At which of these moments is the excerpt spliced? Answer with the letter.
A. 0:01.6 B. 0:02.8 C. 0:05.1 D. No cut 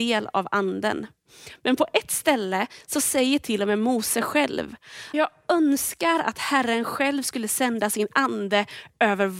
C